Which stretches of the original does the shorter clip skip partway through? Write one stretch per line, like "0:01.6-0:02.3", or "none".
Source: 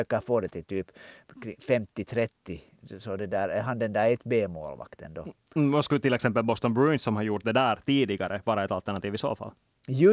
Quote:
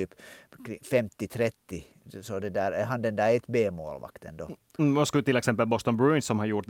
none